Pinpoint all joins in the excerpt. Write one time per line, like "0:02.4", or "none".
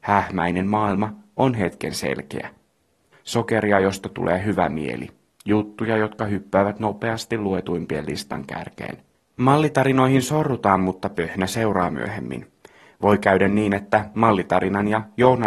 0:03.1
0:09.1